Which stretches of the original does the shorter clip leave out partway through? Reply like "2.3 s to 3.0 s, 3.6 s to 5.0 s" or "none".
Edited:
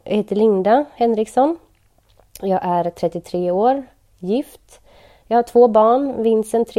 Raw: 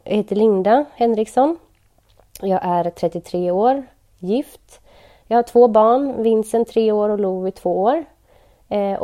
none